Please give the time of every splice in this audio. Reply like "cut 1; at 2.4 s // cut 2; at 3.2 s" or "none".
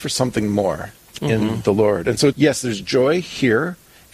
cut 1; at 1.2 s // cut 2; at 2.3 s

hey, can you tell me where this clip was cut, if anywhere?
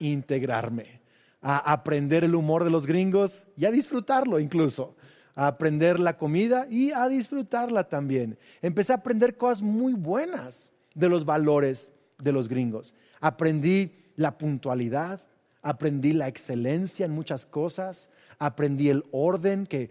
none

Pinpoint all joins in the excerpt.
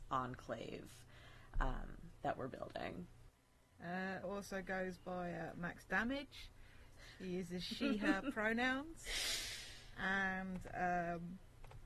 cut 1; at 4.2 s

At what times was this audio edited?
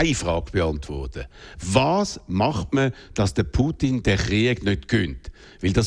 none

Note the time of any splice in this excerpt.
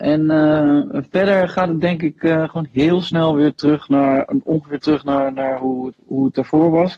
cut 1; at 5.9 s

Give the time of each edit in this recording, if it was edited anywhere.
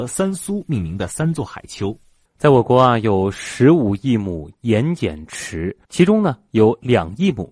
cut 1; at 2.3 s // cut 2; at 5.8 s

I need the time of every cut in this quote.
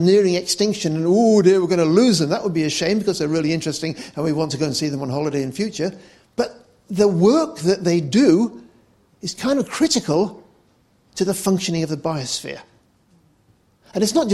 none

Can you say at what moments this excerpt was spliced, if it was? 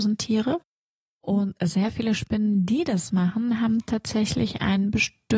none

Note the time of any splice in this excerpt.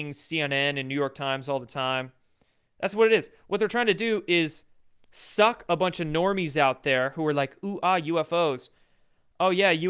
none

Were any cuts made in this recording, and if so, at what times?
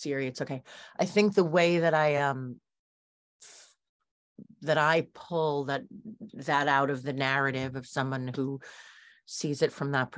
none

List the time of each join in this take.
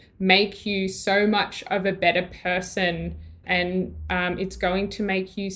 cut 1; at 3.4 s

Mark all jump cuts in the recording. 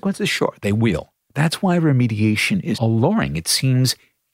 cut 1; at 1.2 s // cut 2; at 2.7 s

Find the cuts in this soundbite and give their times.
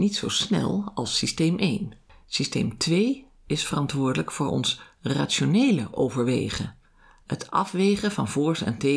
none

